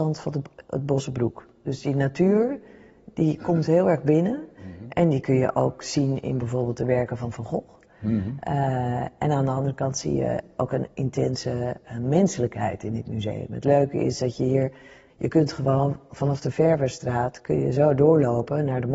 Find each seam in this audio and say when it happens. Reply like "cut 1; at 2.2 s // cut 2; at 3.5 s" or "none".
cut 1; at 15.1 s